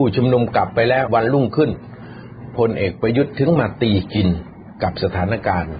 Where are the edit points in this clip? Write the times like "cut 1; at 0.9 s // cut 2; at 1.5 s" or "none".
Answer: cut 1; at 1.1 s